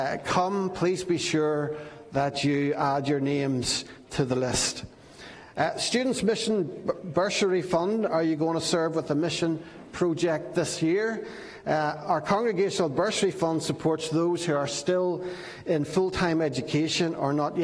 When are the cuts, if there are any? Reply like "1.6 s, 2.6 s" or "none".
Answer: 8.1 s